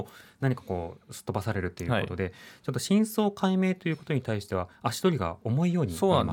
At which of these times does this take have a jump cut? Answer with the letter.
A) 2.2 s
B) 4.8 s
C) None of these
C